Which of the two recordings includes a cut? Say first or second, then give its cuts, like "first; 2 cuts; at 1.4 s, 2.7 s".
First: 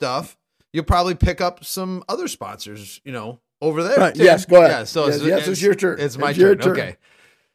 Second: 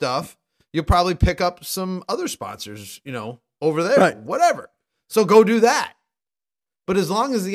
first; 1 cut; at 4.1 s